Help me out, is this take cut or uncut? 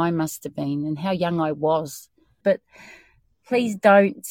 cut